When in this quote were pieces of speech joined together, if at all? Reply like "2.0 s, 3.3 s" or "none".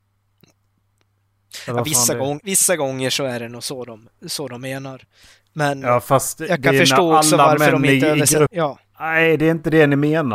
2.4 s, 8.5 s